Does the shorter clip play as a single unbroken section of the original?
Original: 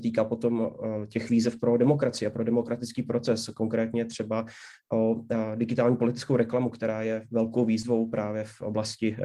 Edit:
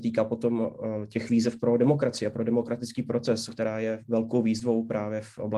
no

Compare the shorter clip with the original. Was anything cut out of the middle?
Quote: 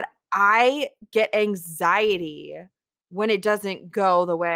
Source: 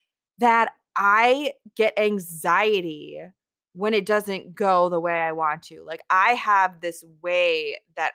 no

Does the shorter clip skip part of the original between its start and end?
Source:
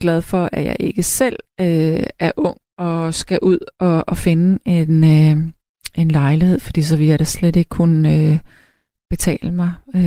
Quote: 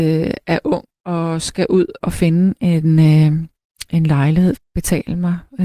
yes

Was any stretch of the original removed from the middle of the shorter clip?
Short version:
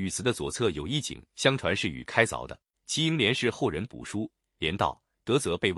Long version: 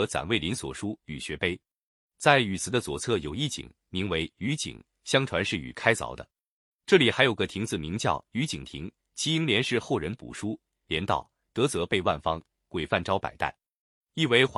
yes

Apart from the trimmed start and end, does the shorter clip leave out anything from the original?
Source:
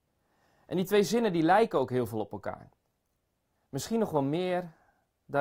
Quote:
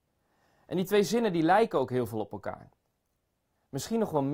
no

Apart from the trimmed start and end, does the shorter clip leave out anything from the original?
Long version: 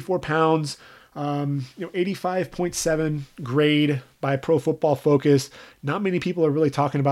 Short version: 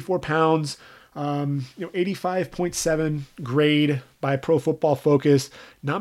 no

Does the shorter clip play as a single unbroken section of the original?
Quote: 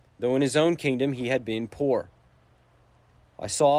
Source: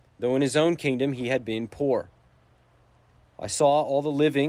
yes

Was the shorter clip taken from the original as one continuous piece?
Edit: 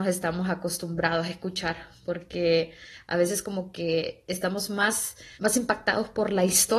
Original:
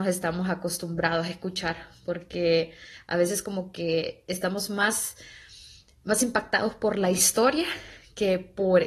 no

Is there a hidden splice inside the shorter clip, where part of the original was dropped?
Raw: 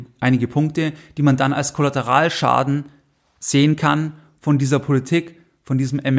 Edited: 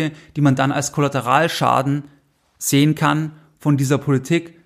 no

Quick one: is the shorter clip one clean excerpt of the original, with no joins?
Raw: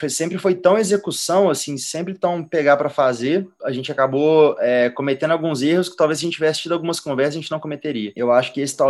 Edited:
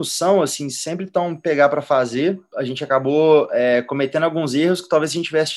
yes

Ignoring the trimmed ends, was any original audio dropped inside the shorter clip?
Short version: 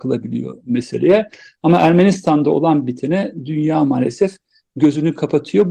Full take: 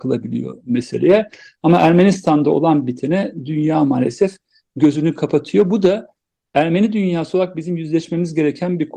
no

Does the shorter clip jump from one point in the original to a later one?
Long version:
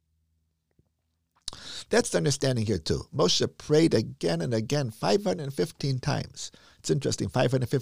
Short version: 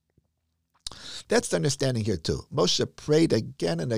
no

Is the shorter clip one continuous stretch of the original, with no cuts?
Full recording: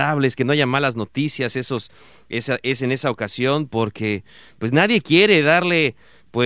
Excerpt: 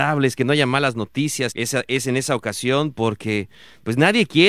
no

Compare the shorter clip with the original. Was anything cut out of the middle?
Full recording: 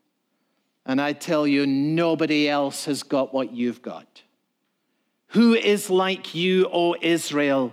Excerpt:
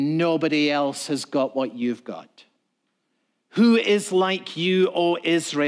no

